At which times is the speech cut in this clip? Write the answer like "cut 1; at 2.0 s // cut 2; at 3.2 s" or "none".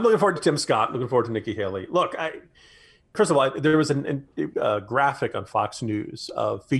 cut 1; at 4.5 s